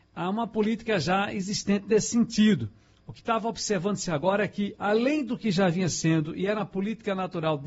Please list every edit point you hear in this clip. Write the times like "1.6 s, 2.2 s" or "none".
none